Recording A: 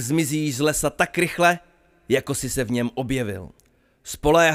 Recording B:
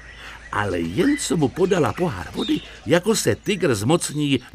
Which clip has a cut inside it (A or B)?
B